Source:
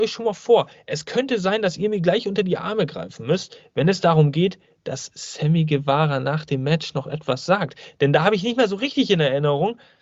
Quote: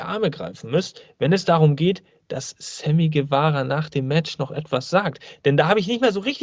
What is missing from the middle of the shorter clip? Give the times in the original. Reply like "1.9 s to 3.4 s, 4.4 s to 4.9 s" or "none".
none